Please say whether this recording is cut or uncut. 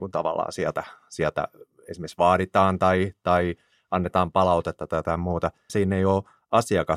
cut